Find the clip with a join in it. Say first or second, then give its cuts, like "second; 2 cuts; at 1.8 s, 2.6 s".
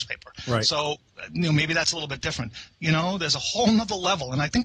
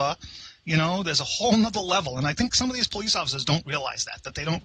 first; 1 cut; at 2.7 s